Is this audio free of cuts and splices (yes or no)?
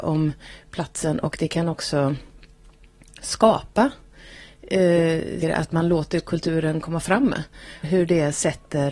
no